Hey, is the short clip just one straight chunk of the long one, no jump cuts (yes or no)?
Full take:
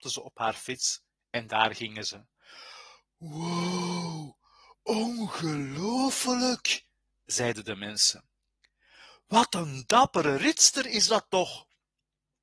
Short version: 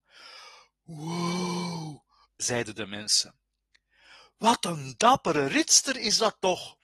no